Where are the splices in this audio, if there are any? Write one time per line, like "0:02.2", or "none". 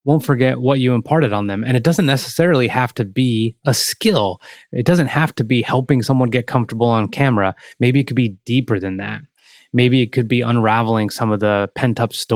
none